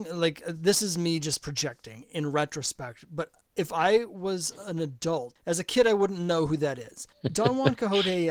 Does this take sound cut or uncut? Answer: cut